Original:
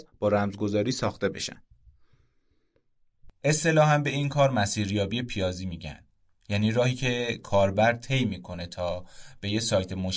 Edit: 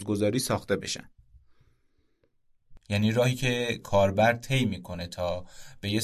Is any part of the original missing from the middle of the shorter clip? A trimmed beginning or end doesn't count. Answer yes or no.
yes